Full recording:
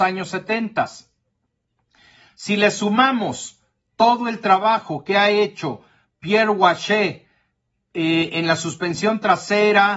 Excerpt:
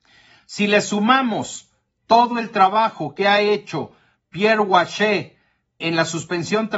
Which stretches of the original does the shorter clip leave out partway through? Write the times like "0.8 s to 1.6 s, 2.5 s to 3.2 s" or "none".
7.7 s to 8.3 s

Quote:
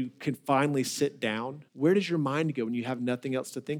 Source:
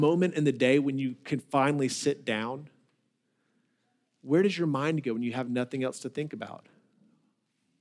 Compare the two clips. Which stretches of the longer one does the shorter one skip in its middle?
2.7 s to 4.2 s

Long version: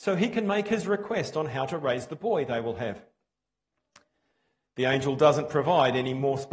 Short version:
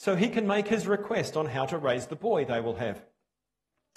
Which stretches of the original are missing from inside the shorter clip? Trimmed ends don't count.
none

